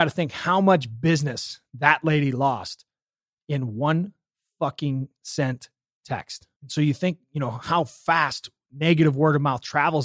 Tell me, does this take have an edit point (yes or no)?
yes